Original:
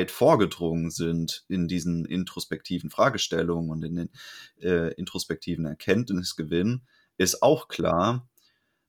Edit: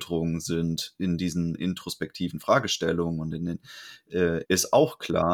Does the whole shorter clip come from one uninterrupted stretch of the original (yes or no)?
no